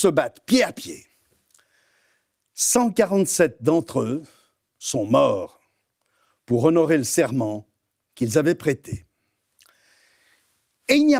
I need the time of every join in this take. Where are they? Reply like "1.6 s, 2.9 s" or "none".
none

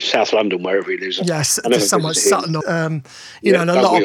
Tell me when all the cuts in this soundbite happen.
2.6 s

